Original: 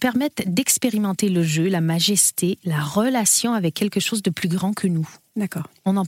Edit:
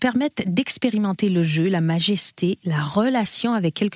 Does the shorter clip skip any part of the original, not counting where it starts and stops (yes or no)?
no